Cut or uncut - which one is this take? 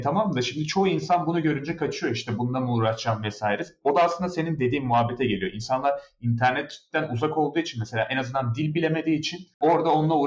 uncut